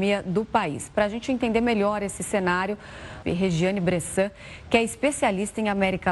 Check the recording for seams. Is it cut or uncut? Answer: cut